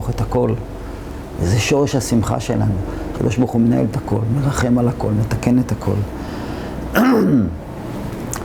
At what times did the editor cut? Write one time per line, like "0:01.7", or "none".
0:03.1